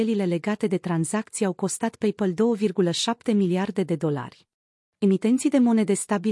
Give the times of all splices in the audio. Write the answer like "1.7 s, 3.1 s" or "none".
4.9 s